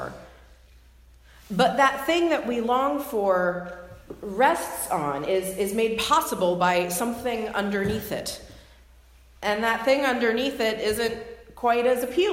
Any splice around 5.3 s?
no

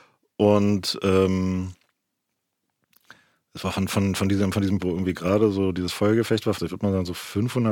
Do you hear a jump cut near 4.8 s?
yes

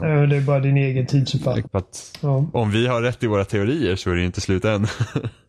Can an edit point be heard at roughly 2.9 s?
no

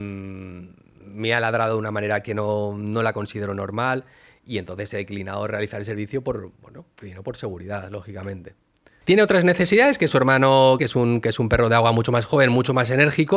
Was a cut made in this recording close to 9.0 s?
yes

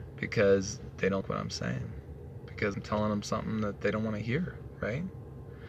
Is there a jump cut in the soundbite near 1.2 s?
yes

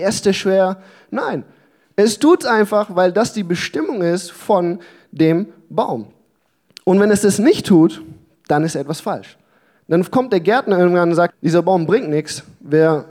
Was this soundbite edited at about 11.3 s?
yes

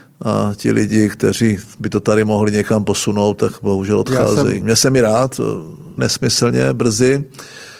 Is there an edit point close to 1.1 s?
no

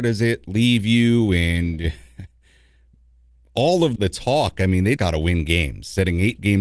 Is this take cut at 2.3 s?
no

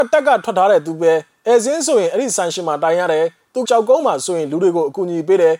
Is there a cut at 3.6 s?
yes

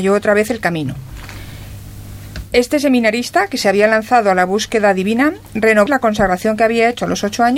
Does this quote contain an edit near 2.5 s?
no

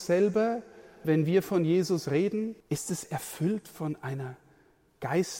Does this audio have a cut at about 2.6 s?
yes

